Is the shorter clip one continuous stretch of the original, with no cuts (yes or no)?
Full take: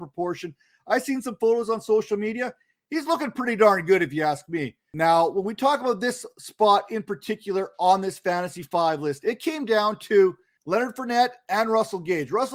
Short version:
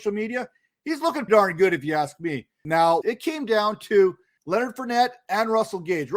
no